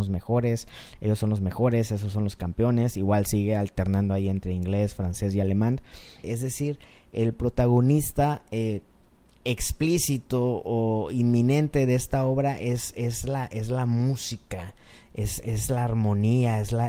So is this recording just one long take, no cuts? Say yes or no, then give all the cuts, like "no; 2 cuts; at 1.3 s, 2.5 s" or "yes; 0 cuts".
no; 1 cut; at 6.2 s